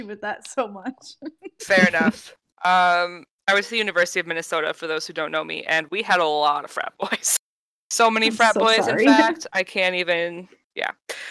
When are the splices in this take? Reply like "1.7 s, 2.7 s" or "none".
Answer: none